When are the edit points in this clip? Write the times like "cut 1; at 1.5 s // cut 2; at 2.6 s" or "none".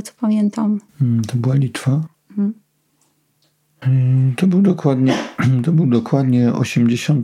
cut 1; at 2.1 s